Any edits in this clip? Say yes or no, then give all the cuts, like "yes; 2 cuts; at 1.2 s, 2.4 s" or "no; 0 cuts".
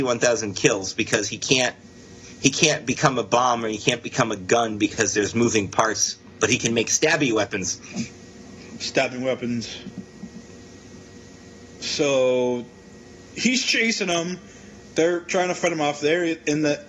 no; 0 cuts